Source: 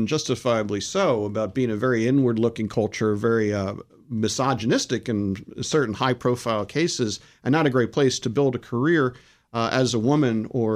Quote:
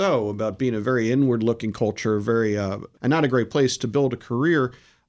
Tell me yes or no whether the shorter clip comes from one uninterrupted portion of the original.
no